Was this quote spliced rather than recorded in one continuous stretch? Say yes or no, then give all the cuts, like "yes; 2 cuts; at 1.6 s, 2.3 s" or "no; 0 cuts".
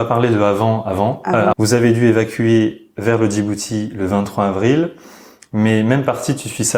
yes; 1 cut; at 1.5 s